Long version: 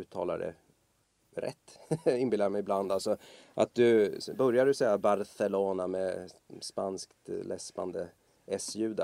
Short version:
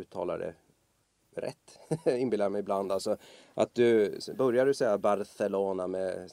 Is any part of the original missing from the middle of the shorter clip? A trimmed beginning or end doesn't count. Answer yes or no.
no